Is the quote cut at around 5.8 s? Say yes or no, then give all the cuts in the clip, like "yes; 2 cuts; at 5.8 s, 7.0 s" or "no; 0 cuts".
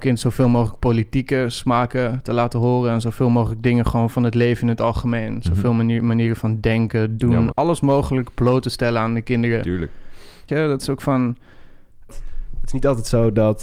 no; 3 cuts; at 7.5 s, 10.5 s, 12.1 s